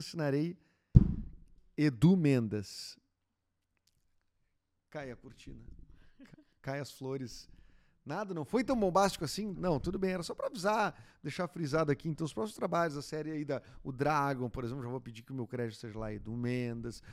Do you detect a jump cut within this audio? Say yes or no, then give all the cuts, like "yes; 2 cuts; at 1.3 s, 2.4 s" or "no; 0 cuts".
yes; 1 cut; at 9.5 s